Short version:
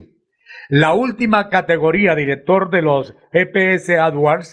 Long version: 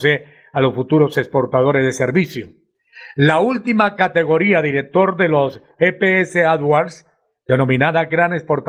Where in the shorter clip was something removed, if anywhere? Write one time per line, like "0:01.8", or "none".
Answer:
none